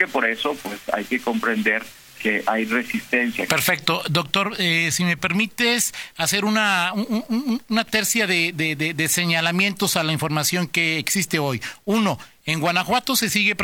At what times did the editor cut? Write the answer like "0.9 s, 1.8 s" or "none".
3.5 s